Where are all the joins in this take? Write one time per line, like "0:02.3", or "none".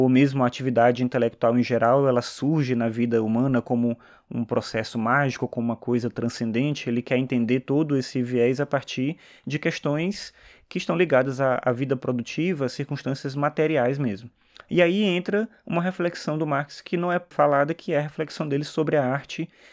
0:17.3